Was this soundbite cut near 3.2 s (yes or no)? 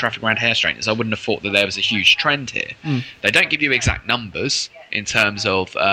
yes